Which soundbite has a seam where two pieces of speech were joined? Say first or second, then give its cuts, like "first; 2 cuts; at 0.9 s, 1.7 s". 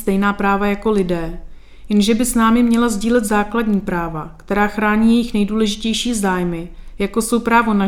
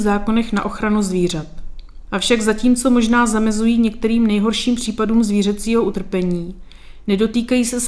second; 1 cut; at 2.1 s